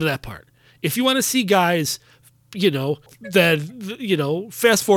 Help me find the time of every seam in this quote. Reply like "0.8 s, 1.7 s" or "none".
3.1 s